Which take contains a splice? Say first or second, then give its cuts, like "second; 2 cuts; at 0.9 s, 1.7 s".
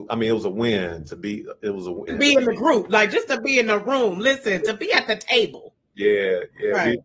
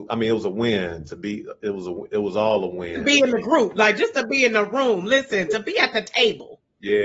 first; 1 cut; at 2.1 s